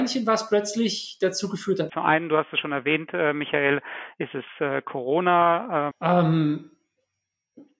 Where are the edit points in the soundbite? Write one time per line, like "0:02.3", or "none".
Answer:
0:01.9
0:05.9